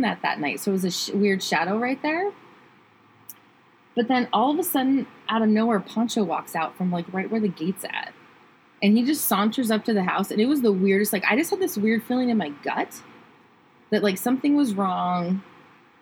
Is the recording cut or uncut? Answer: uncut